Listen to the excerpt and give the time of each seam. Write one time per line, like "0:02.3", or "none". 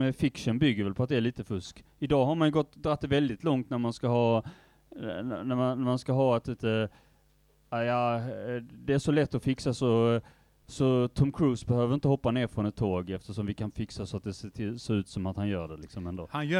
0:06.6